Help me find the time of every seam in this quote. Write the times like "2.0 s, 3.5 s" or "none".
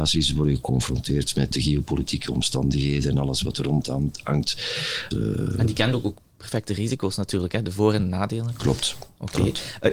1.5 s, 5.1 s